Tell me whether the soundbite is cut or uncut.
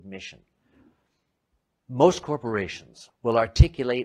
cut